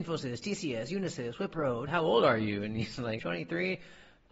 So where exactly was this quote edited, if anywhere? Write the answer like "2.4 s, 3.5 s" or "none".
1.9 s, 3.2 s